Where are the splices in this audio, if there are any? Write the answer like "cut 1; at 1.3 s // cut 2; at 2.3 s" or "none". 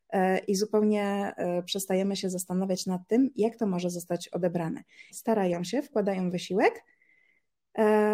cut 1; at 5.1 s